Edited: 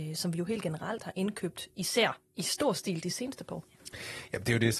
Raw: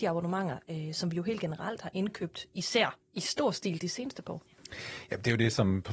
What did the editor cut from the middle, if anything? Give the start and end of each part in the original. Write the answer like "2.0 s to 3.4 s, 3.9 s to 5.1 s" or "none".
none